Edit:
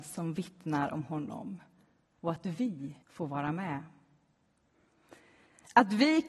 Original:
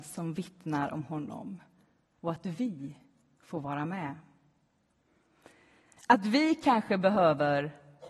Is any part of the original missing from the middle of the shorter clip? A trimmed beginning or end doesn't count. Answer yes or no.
yes